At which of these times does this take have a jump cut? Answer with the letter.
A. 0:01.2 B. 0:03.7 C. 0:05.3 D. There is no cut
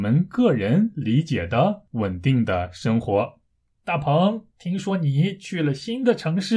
B